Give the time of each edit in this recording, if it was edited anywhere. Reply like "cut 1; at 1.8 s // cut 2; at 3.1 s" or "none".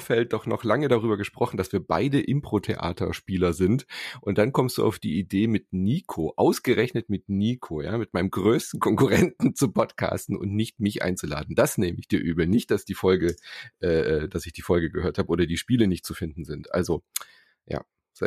none